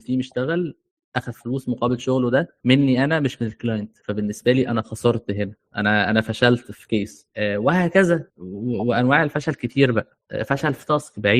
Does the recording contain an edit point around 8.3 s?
yes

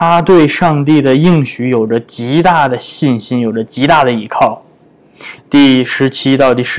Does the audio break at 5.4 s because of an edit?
yes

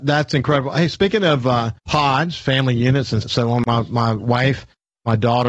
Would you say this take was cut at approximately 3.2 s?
yes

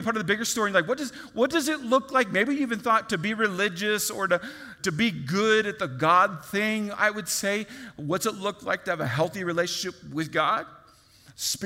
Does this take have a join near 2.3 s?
no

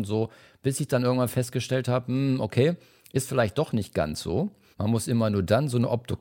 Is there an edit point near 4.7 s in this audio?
yes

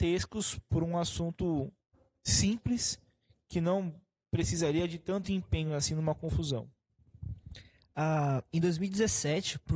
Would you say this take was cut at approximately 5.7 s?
no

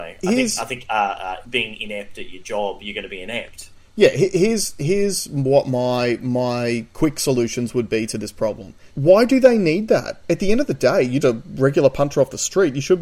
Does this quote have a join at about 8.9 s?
yes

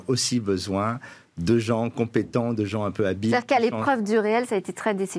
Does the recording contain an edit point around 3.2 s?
no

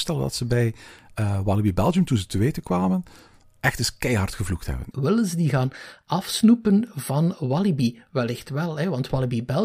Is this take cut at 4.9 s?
yes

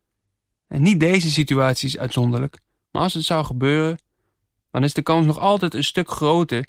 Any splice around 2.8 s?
yes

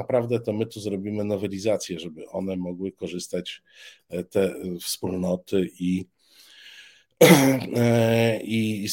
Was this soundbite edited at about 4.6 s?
yes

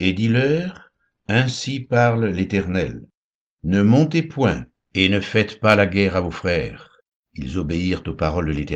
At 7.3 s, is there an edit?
yes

